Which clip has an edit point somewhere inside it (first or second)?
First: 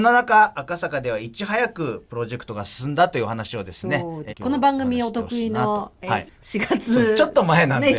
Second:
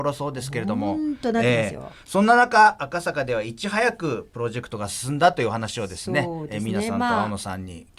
first